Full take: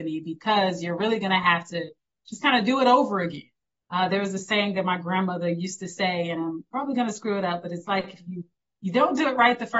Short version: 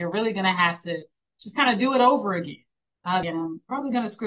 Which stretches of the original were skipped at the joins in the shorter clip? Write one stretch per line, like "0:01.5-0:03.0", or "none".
0:04.1-0:06.3